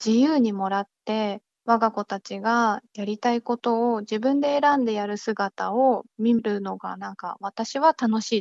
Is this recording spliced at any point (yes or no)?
no